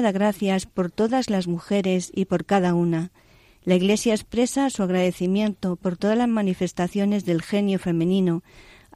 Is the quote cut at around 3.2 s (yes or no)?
no